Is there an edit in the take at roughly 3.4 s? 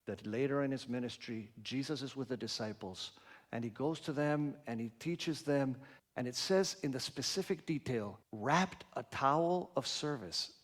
no; 2 cuts; at 6.0 s, 8.2 s

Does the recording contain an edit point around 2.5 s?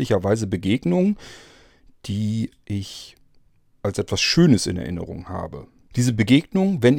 yes; 2 cuts; at 2.5 s, 5.9 s

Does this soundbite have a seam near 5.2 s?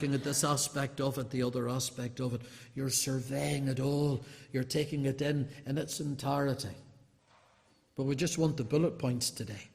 no; 0 cuts

